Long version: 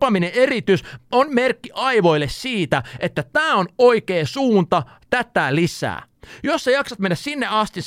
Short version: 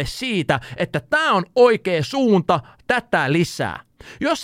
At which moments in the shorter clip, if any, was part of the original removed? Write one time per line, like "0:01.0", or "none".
none